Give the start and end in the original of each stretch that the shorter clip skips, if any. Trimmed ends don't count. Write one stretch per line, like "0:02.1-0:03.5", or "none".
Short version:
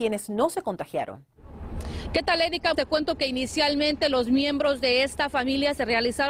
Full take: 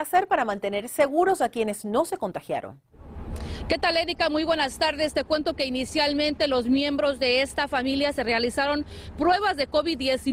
0:04.3-0:05.1